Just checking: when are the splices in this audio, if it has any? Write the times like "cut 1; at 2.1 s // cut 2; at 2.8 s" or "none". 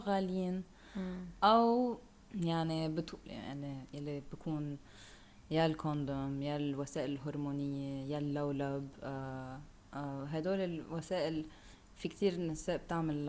cut 1; at 3.2 s